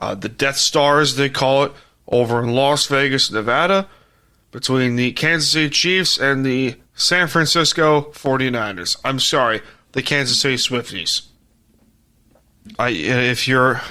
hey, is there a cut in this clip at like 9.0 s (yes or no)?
no